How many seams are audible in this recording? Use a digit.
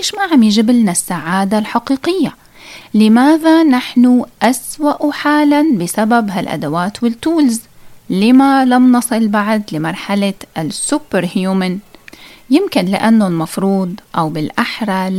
1